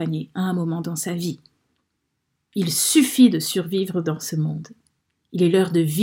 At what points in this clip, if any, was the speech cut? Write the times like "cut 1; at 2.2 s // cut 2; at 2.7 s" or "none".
none